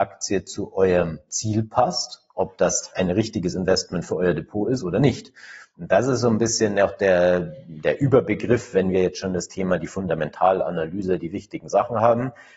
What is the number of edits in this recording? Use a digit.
0